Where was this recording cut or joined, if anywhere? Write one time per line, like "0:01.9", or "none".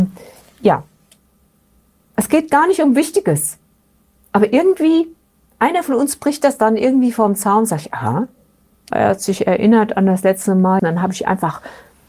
0:08.9
0:10.8